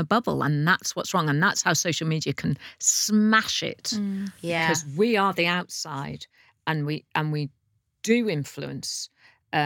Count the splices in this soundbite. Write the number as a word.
zero